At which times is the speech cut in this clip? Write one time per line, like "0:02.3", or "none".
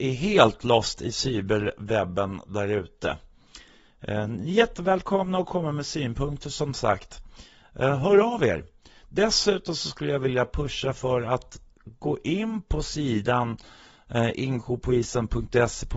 none